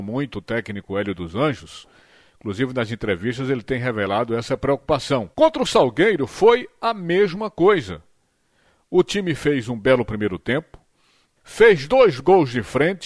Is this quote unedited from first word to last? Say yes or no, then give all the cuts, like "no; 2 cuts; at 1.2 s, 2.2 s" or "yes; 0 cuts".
no; 2 cuts; at 5.3 s, 11.4 s